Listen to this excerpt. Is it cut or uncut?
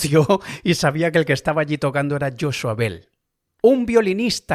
uncut